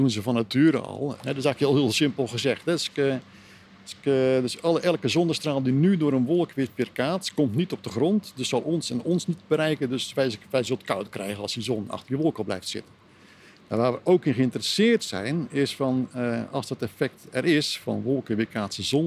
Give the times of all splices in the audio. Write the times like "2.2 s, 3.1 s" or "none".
none